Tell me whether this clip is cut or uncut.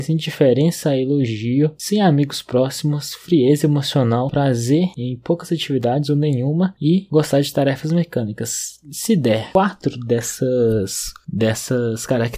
uncut